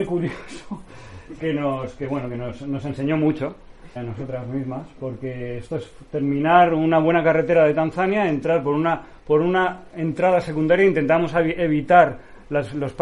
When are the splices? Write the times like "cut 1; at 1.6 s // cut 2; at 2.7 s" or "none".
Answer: cut 1; at 4.0 s